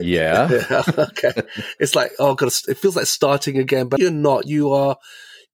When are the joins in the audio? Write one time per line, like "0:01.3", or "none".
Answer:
0:04.0